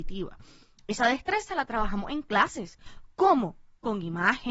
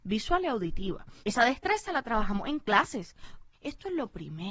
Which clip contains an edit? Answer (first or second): second